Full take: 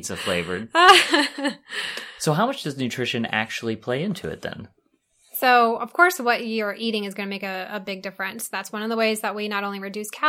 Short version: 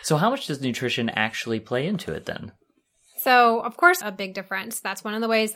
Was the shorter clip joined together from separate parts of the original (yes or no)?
yes